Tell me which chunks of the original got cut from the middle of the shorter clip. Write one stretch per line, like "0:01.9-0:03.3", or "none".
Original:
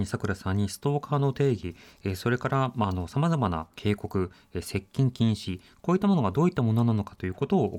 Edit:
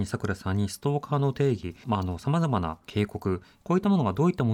0:01.8-0:02.7
0:04.5-0:05.8